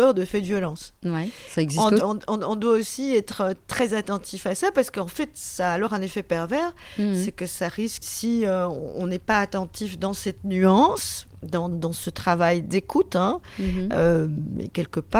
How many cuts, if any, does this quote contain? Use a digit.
3